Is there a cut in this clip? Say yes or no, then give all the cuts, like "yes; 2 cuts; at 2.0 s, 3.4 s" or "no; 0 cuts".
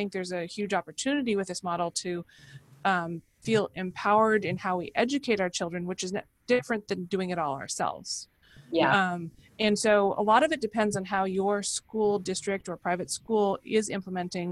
no; 0 cuts